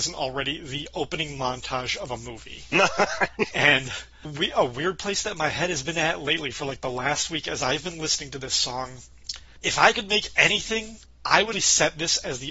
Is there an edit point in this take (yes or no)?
yes